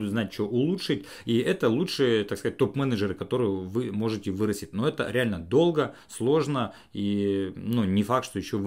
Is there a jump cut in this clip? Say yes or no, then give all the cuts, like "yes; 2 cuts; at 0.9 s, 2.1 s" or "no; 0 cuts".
no; 0 cuts